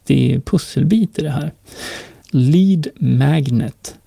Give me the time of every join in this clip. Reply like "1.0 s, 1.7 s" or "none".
2.2 s